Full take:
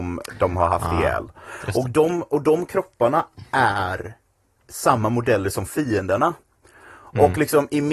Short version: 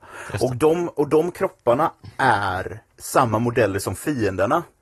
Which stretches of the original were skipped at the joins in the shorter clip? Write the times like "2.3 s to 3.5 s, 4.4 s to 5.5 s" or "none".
4.2 s to 4.6 s